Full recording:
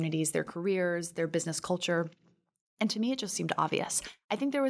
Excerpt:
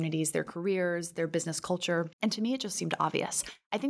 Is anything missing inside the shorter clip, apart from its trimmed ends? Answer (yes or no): yes